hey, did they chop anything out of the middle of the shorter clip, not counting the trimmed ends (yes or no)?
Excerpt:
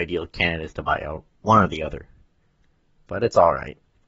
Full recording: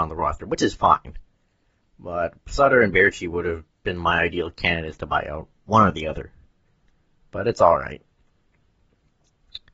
no